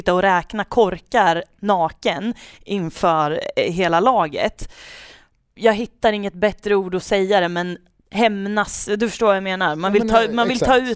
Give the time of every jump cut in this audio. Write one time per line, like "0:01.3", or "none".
0:05.6